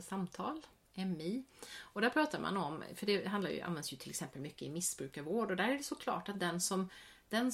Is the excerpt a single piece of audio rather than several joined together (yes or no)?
yes